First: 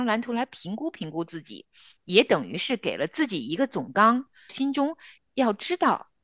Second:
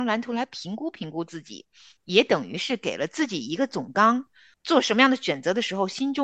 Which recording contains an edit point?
first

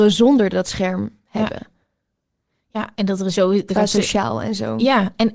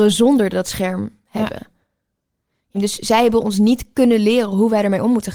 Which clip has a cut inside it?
second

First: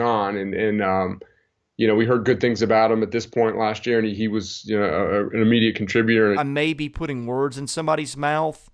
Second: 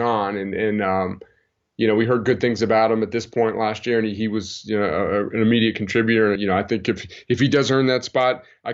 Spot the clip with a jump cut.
first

